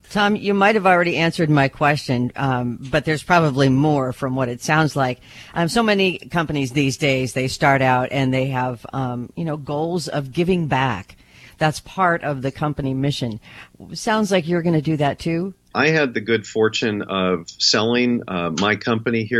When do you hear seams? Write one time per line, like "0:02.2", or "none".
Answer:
0:15.7